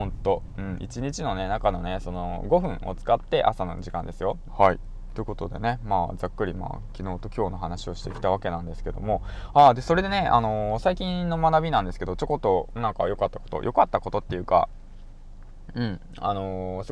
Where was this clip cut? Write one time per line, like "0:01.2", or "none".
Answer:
0:04.5